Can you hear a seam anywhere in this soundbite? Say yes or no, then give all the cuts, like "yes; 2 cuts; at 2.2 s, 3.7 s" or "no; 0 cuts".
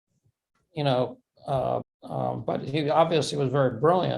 yes; 1 cut; at 1.8 s